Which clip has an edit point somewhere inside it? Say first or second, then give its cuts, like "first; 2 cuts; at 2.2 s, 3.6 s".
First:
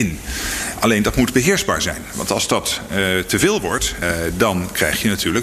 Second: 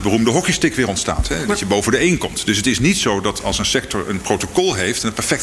first; 1 cut; at 4.0 s